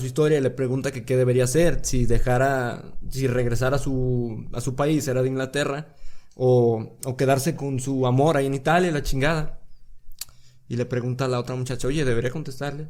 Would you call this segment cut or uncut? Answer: uncut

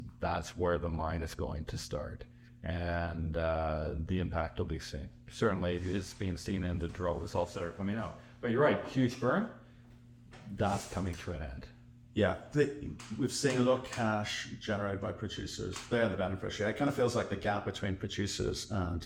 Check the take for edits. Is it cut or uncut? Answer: uncut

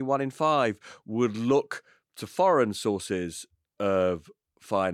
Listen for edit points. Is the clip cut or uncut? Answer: uncut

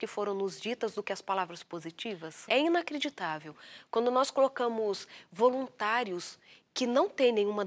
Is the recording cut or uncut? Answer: cut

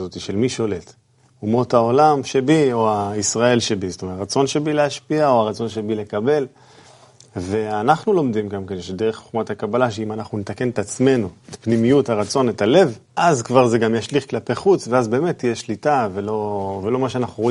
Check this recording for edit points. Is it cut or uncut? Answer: cut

